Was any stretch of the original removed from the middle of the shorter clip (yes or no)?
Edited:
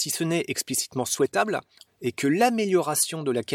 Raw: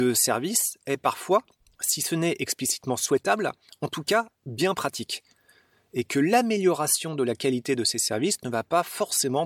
yes